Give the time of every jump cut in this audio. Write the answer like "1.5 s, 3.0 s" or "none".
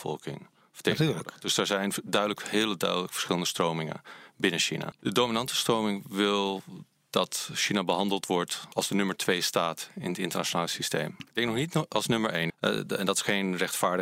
4.9 s, 11.2 s, 12.5 s